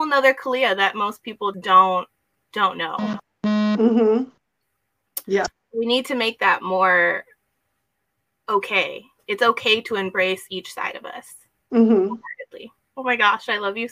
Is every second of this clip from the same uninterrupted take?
no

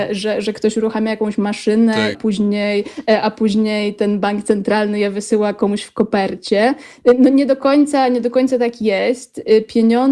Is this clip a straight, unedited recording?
no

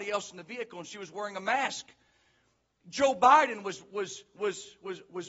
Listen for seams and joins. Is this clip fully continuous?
yes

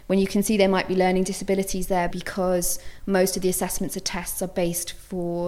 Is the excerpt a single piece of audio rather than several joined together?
no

